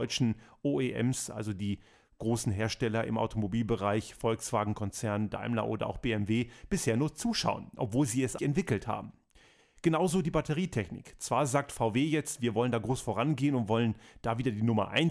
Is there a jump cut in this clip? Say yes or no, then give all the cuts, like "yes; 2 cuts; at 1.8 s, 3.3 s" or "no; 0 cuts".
yes; 1 cut; at 8.4 s